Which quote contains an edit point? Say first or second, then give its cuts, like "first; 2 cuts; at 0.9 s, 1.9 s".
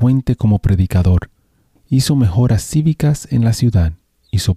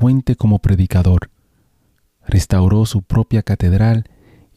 first; 1 cut; at 1.8 s